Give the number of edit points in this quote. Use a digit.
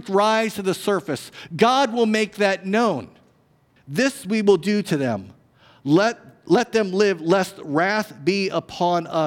1